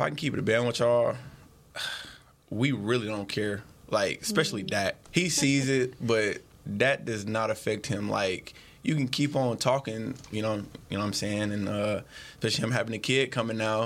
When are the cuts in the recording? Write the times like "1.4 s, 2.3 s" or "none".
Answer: 5.1 s, 10.3 s